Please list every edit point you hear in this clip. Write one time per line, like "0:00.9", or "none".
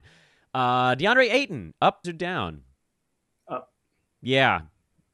0:02.0